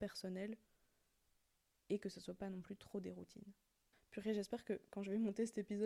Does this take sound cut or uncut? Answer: cut